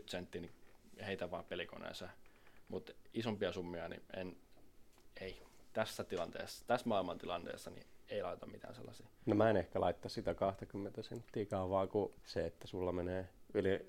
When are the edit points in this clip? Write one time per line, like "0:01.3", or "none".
0:12.2